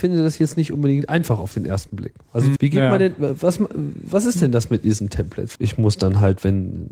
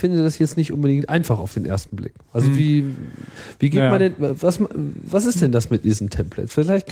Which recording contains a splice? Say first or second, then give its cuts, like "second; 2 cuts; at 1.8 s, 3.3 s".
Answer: first; 2 cuts; at 2.6 s, 5.5 s